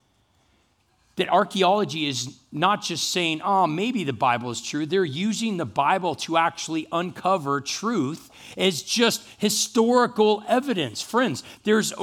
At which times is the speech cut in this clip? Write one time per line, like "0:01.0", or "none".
none